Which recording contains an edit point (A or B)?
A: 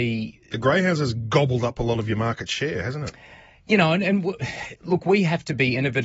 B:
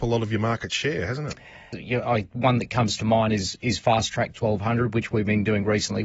B